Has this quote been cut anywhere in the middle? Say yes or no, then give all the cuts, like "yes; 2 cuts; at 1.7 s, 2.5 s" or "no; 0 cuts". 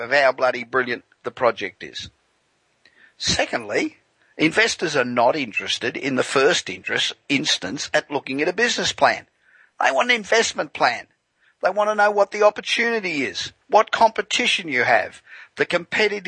yes; 1 cut; at 13.6 s